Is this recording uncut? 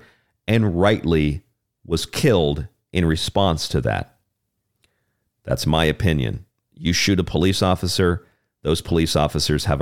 yes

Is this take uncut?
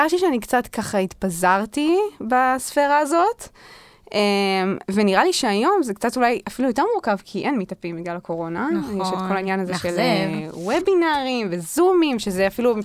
yes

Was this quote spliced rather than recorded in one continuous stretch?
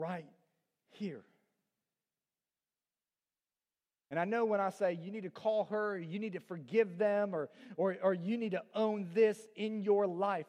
no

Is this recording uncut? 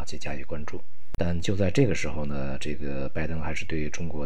no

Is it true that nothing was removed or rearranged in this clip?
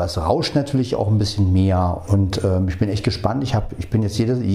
no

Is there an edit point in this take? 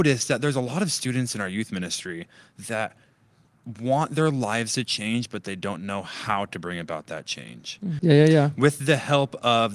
yes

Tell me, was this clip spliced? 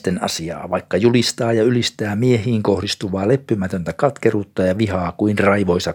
no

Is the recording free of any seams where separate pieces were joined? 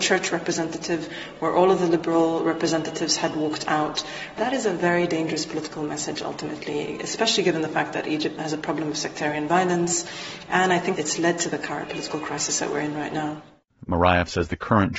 no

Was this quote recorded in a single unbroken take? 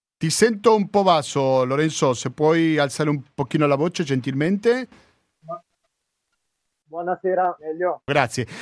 no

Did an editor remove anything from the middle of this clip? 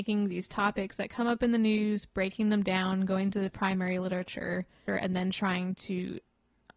yes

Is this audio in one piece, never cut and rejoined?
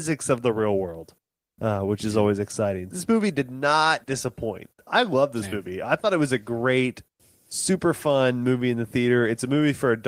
no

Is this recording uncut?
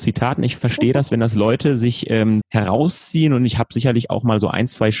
no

